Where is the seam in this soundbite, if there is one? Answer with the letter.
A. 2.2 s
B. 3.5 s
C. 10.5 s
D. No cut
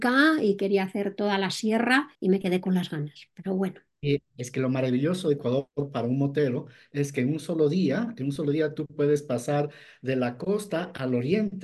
A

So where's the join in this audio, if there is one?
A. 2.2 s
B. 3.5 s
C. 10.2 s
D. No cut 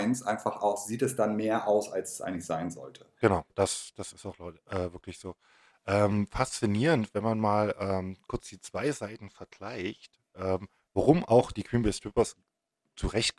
B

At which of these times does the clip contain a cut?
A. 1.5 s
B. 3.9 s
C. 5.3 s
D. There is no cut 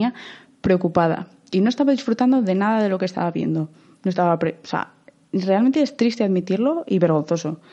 D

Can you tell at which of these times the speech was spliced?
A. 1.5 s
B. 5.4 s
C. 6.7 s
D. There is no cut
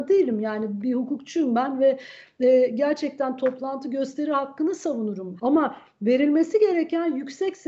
B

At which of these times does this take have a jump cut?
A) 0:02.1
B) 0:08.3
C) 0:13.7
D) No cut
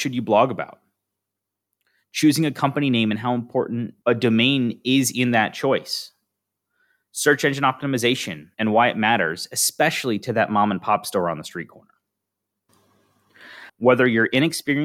C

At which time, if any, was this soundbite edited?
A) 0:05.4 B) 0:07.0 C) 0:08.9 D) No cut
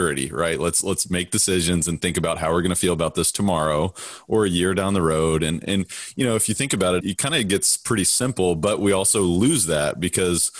B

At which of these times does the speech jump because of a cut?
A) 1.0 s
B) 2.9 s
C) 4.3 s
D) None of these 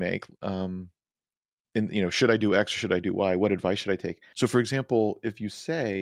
C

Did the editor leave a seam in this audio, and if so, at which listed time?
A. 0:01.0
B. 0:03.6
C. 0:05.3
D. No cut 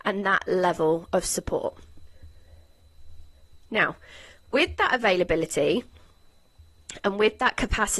D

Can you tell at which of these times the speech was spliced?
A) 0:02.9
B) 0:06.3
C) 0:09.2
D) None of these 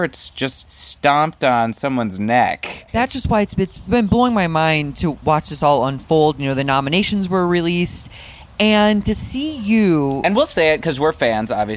D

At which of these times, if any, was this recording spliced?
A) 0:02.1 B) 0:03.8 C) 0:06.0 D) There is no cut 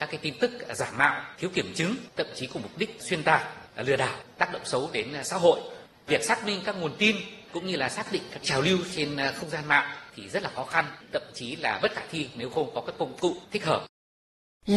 D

